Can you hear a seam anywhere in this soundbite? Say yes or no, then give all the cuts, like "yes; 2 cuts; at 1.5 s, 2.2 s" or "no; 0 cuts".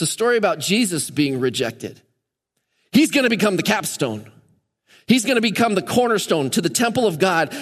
no; 0 cuts